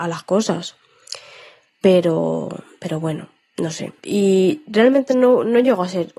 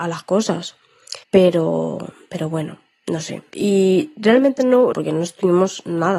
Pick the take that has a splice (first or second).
second